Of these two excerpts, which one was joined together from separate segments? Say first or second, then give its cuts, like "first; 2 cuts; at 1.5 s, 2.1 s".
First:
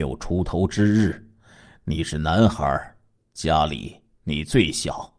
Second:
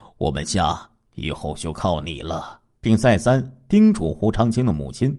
second; 1 cut; at 2.8 s